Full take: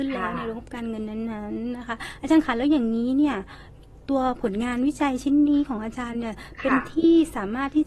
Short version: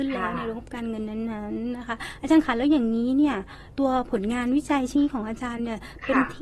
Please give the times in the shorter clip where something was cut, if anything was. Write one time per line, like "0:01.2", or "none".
0:03.7
0:05.0